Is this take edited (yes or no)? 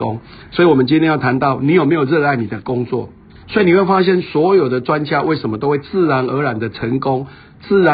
yes